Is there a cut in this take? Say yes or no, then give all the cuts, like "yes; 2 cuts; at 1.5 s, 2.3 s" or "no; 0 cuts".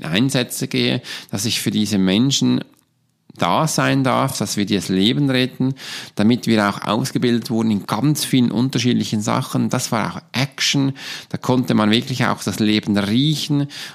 no; 0 cuts